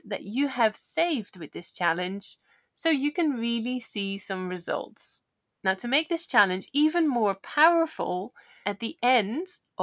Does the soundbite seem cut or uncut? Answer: cut